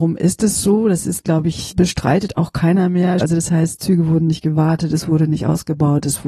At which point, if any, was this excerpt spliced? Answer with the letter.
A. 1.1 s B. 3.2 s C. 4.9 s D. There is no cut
B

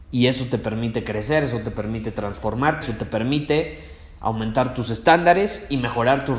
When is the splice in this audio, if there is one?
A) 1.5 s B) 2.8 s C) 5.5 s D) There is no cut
B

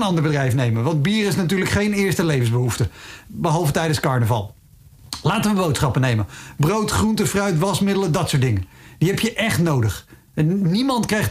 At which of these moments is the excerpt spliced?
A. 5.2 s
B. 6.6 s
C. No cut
C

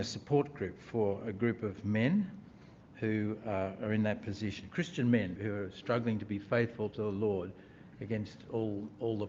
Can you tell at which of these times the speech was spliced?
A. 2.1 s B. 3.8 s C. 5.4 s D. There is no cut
C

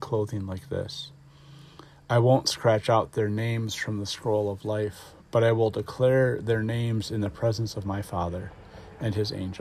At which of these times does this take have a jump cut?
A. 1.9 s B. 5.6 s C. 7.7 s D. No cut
D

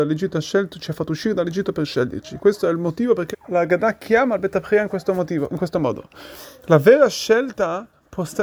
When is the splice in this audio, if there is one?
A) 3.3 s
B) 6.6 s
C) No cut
A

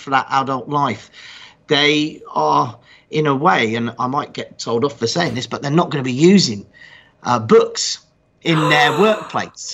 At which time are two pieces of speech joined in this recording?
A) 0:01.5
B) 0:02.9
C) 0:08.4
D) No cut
D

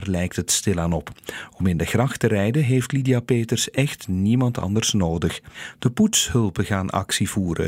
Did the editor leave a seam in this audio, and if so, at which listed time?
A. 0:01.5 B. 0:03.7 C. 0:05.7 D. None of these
C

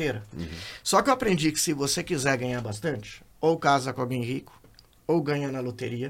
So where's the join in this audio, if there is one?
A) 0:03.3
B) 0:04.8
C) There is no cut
A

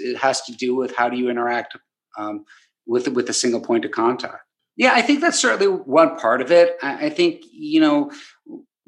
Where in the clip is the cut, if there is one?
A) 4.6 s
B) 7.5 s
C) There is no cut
A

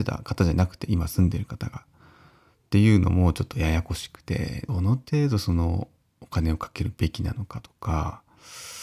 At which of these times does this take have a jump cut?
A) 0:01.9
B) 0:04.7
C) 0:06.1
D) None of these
B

